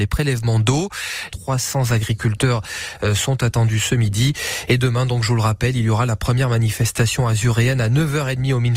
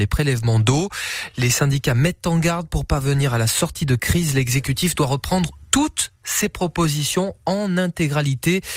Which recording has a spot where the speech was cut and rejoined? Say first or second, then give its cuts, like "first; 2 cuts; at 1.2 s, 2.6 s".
first; 1 cut; at 1.3 s